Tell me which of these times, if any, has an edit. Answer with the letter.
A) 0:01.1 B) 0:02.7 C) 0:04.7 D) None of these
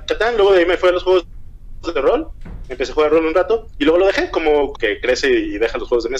C